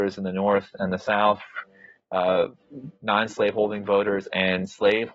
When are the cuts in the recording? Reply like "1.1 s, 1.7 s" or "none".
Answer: none